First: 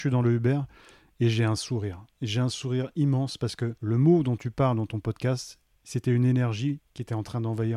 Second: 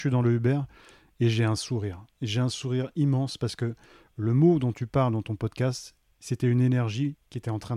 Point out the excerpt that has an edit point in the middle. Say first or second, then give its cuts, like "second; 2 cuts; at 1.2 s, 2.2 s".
first; 1 cut; at 3.8 s